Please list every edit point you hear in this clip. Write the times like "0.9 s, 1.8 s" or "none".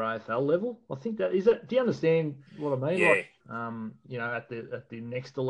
3.4 s